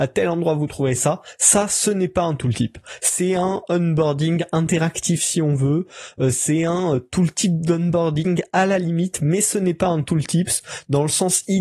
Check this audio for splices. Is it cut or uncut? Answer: uncut